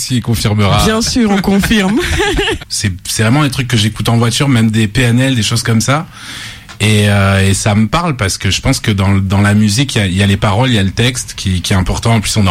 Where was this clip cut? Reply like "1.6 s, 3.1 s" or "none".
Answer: 2.6 s